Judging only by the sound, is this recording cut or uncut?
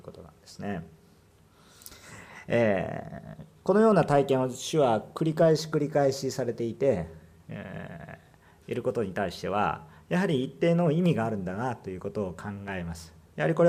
uncut